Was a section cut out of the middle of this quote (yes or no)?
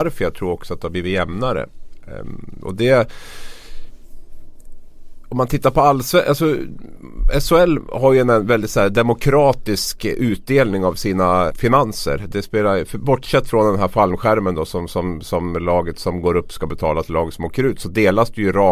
yes